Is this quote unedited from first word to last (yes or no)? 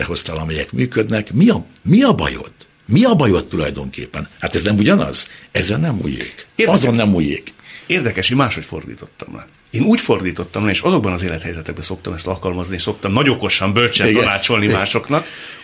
yes